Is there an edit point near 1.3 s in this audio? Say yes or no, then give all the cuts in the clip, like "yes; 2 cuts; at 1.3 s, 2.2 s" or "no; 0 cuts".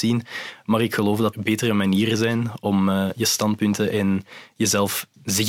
yes; 1 cut; at 1.3 s